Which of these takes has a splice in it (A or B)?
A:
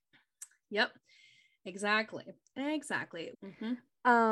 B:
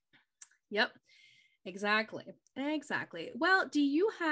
A